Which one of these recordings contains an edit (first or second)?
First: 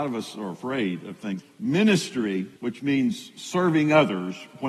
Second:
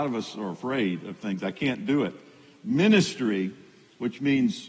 first